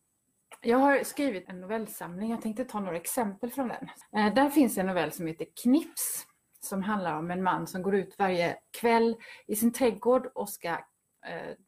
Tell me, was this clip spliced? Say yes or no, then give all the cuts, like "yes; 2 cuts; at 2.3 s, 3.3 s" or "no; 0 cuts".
yes; 1 cut; at 1.4 s